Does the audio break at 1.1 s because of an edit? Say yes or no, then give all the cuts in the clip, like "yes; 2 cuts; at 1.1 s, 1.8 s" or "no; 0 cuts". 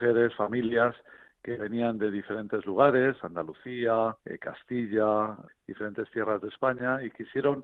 no; 2 cuts; at 4.2 s, 5.5 s